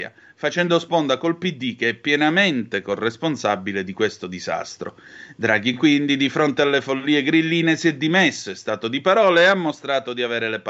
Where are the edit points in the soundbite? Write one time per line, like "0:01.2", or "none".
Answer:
none